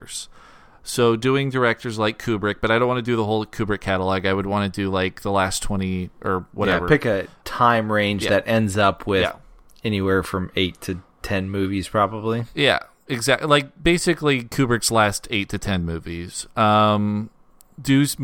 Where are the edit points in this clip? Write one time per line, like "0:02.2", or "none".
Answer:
none